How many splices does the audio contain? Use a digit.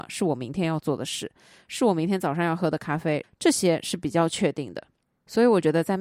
1